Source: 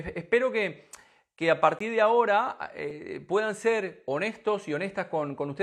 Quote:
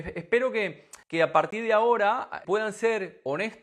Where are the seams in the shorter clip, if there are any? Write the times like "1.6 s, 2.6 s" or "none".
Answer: 1.0 s, 2.4 s